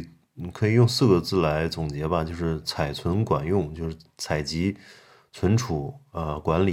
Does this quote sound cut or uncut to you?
uncut